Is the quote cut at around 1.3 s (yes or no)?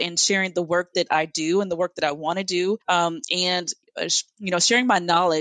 no